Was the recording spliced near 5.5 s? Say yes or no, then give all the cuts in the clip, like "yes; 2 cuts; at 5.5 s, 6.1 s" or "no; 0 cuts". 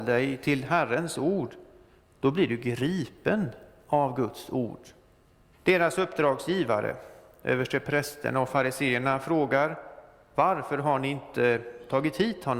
yes; 1 cut; at 5.5 s